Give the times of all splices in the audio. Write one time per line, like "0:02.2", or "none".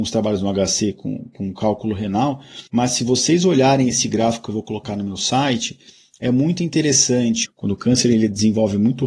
0:02.7
0:07.4